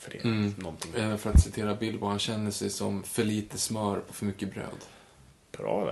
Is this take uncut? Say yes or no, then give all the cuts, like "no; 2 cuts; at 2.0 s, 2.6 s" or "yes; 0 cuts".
yes; 0 cuts